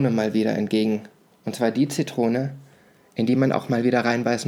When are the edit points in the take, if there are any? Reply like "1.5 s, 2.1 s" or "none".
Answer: none